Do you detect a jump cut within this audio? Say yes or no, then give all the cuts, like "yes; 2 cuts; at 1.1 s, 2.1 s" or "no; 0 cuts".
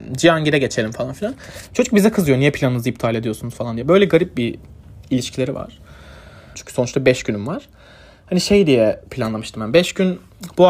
yes; 1 cut; at 6.5 s